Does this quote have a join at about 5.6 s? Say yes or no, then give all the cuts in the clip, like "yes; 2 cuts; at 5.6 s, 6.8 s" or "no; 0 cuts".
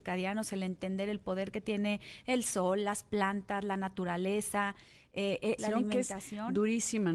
yes; 1 cut; at 5.6 s